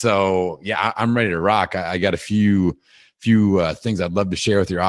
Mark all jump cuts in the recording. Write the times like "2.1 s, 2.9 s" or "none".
none